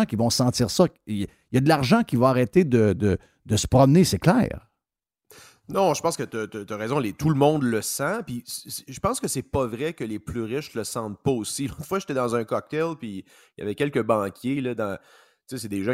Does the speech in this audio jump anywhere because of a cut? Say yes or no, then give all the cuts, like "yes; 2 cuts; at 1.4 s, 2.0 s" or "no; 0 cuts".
no; 0 cuts